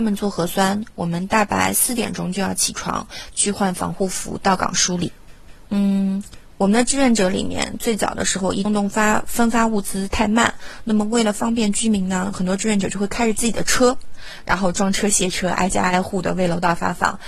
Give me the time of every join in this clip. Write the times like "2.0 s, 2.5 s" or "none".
8.7 s